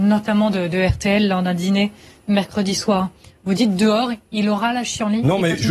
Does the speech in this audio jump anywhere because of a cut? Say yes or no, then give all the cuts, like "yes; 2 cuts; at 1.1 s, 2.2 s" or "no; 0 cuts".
no; 0 cuts